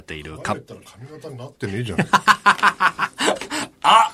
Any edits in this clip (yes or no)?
no